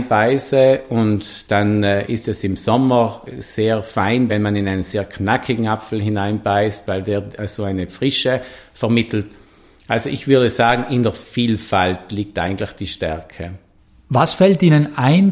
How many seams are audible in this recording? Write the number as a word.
zero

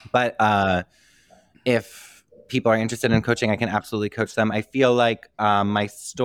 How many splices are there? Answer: zero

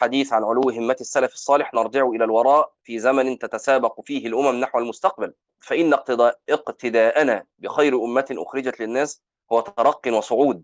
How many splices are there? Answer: one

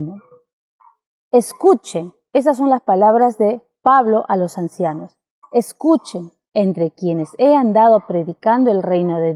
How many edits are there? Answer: one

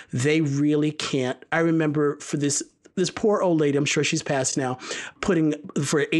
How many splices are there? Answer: zero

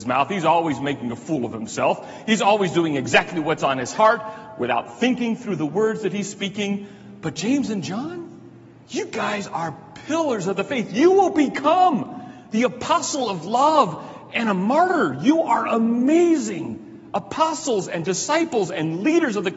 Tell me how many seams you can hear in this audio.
zero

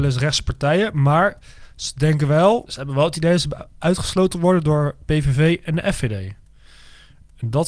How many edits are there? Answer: one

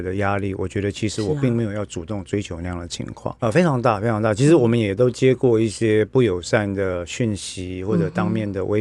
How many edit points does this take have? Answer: one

